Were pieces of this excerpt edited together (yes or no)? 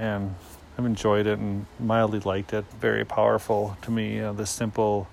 yes